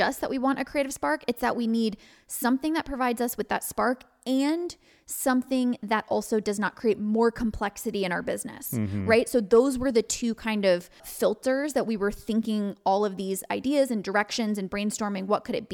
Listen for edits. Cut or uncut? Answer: cut